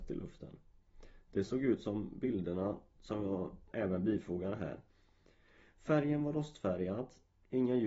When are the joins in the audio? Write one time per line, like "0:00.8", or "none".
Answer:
0:03.7

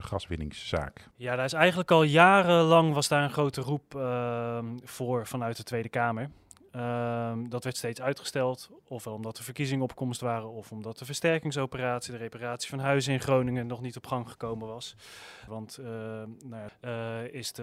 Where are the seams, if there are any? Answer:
0:01.1
0:15.5
0:16.7

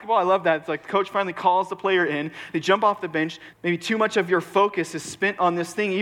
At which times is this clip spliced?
0:03.5

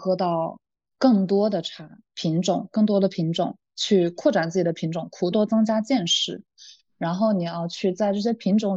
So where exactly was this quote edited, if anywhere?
0:05.3

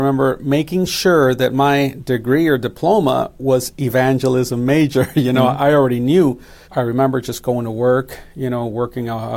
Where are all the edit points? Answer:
0:06.6

